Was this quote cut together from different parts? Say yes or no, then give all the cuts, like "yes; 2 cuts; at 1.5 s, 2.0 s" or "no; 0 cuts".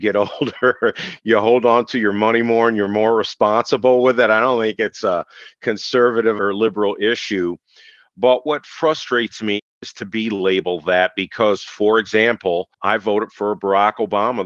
no; 0 cuts